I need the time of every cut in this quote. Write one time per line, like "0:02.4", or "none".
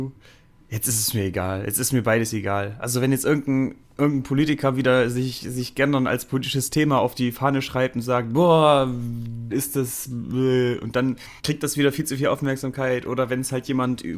0:09.5
0:11.4